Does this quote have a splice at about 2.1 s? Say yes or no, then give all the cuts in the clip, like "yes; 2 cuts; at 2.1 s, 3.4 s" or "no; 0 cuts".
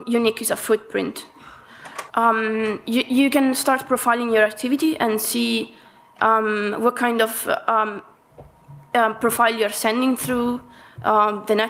yes; 1 cut; at 2.1 s